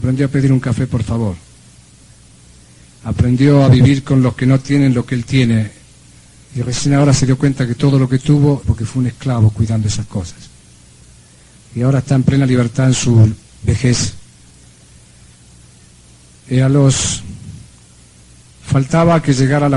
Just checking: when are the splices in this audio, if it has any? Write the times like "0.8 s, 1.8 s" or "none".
8.6 s